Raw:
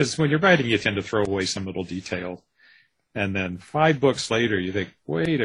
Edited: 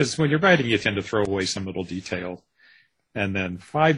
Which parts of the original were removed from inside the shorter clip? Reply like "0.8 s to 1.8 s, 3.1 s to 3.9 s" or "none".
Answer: none